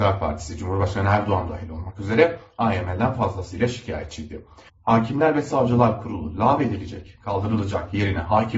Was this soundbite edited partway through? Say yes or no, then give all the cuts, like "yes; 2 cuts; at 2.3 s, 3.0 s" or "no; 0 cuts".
yes; 1 cut; at 4.7 s